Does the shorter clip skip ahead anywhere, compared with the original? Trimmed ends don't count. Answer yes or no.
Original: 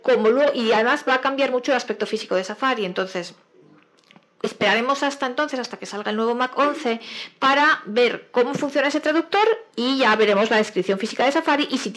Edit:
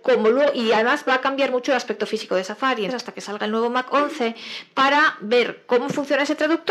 yes